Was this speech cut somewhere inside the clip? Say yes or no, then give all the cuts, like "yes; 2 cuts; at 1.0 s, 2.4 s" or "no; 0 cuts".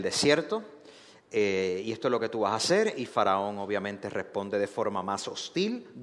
no; 0 cuts